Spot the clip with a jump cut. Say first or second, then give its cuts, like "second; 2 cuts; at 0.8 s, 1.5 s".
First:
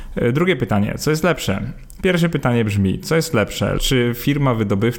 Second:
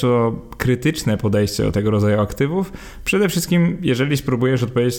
first; 2 cuts; at 2.0 s, 3.8 s